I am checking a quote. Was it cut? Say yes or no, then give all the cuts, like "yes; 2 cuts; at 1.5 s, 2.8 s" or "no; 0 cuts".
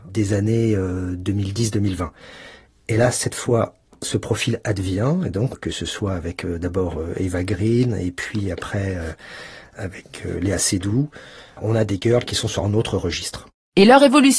no; 0 cuts